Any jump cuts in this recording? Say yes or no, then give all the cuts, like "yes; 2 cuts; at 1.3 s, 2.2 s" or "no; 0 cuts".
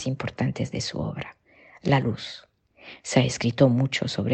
no; 0 cuts